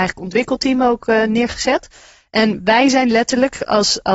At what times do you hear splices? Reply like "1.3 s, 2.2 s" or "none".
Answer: none

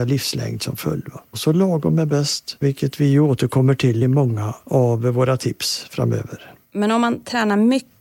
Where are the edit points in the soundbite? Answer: 1.3 s, 6.6 s

